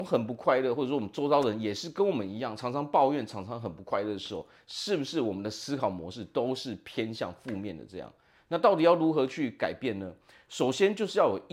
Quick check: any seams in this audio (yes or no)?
no